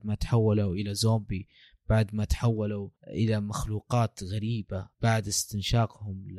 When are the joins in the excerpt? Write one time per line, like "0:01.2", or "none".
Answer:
0:03.0
0:04.9